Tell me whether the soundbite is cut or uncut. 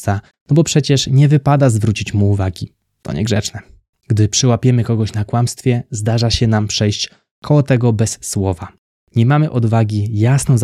uncut